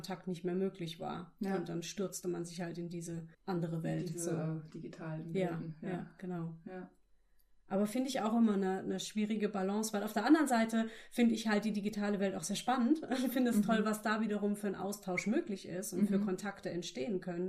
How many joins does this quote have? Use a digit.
1